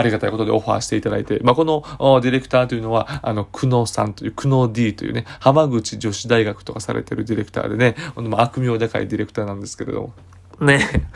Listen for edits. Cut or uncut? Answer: uncut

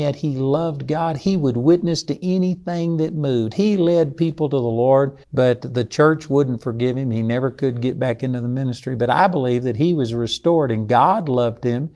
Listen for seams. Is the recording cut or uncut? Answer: cut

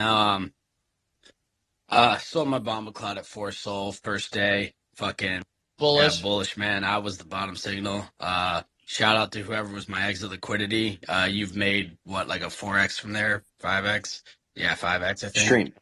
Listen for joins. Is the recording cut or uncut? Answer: uncut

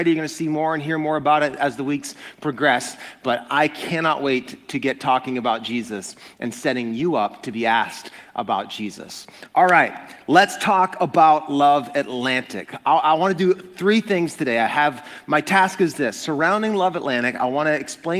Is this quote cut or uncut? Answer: uncut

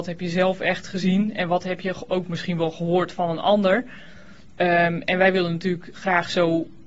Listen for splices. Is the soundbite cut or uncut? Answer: uncut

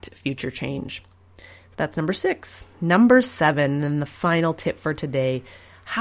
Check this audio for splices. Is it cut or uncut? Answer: uncut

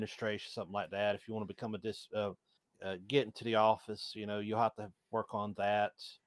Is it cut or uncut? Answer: uncut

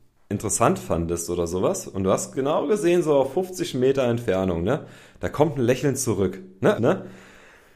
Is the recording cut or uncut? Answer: cut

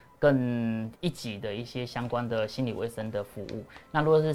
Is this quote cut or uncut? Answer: cut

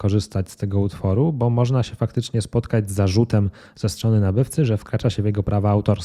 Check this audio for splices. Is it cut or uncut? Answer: uncut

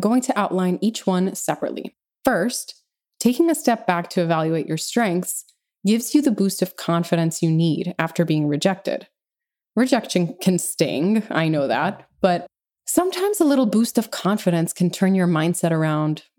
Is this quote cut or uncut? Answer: uncut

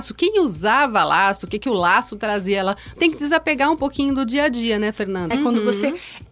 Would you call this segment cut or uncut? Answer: cut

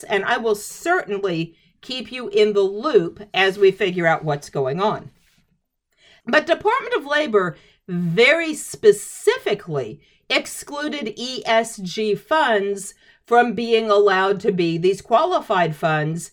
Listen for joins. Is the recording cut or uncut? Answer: cut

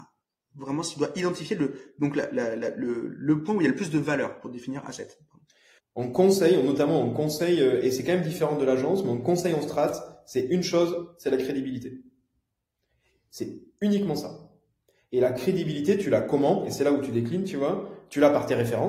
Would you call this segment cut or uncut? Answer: cut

